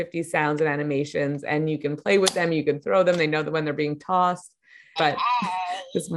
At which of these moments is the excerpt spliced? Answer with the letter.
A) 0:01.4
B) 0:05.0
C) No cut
B